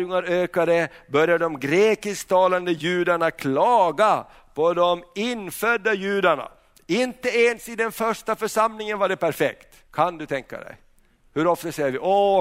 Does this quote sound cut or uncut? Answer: cut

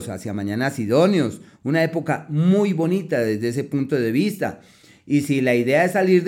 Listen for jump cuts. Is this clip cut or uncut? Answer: uncut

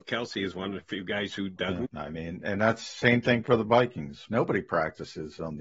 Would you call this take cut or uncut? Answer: cut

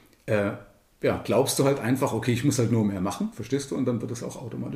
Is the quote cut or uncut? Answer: uncut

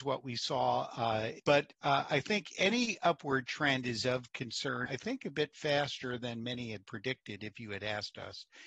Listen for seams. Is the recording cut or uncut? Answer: cut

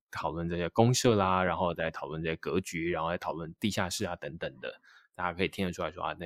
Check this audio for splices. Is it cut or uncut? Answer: uncut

